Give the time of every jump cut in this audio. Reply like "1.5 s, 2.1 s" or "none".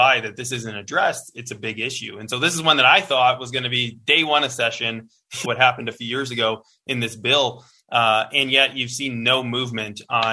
5.4 s